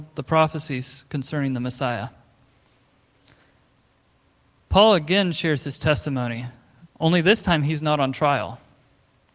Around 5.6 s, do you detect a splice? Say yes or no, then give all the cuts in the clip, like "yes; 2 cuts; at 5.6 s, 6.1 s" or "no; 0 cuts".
no; 1 cut; at 6.9 s